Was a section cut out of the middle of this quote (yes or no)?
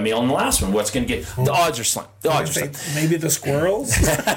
yes